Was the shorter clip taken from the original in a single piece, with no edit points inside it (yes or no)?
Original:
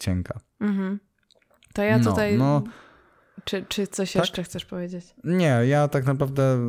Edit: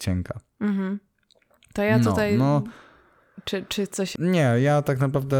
no